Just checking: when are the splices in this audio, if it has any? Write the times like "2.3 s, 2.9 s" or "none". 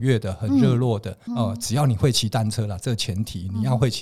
1.3 s